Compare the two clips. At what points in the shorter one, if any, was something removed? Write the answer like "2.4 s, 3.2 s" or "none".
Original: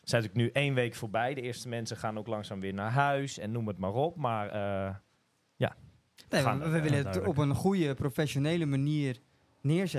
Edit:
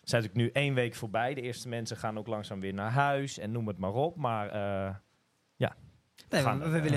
none